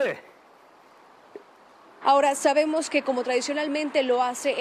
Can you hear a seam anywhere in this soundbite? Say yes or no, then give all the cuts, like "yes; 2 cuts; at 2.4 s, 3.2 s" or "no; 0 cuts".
yes; 1 cut; at 2.0 s